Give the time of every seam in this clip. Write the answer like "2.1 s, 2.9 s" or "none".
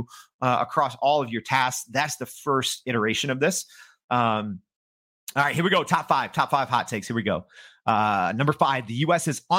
none